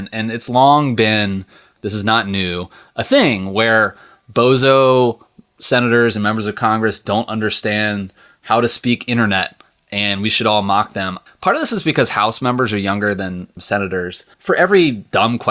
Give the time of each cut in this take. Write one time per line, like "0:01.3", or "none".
0:11.3
0:14.3